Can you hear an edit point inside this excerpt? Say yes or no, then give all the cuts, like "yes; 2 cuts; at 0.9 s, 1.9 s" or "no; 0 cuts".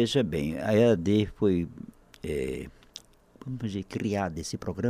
no; 0 cuts